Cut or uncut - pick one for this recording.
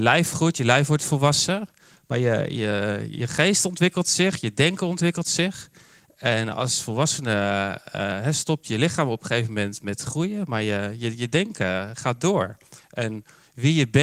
uncut